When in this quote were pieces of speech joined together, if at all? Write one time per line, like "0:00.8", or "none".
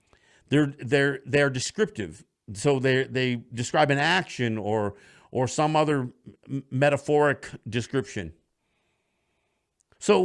none